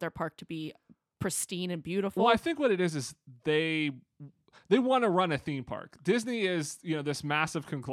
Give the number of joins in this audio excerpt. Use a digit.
0